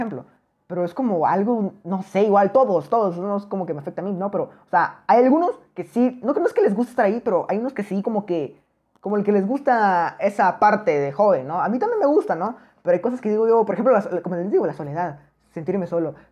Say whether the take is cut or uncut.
uncut